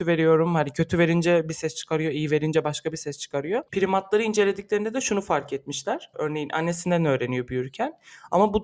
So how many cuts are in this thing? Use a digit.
2